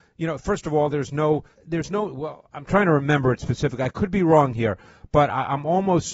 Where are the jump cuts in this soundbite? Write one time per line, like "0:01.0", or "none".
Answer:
0:01.5